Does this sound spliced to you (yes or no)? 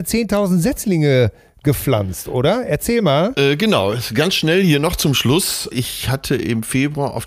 no